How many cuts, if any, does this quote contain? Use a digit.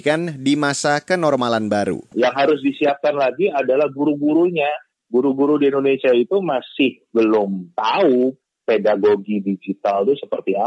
1